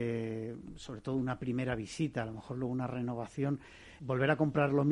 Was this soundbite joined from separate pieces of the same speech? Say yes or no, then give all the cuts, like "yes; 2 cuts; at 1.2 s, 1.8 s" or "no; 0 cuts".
yes; 1 cut; at 4.0 s